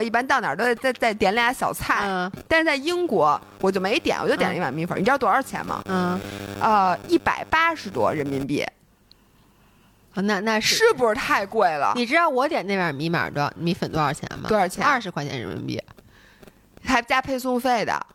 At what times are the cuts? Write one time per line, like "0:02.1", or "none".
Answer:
none